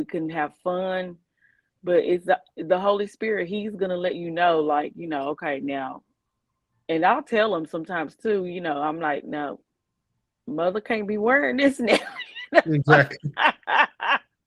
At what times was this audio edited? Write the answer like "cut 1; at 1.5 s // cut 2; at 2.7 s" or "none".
none